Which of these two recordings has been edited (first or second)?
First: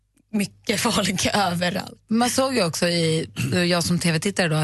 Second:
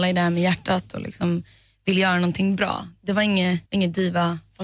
second